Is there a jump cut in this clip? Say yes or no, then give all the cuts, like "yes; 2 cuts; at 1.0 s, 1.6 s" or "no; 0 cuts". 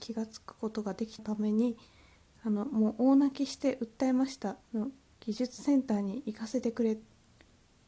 yes; 2 cuts; at 1.2 s, 4.7 s